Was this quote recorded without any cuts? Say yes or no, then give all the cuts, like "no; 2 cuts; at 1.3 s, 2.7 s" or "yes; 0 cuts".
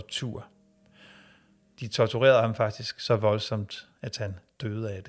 yes; 0 cuts